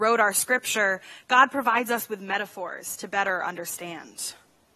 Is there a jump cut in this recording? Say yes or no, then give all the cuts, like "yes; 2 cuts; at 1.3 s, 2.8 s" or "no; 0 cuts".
no; 0 cuts